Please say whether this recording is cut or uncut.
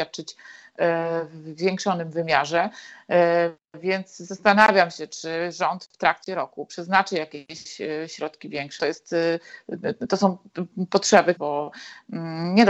cut